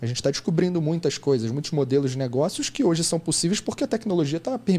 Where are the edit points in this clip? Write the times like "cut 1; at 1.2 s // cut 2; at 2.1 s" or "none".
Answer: none